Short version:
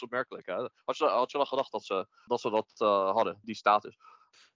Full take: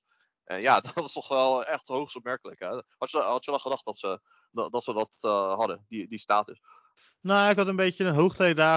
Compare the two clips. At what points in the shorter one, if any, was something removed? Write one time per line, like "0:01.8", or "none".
0:02.3
0:03.4